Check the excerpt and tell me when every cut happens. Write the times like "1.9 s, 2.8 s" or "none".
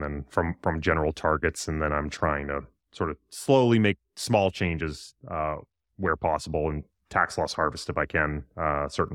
none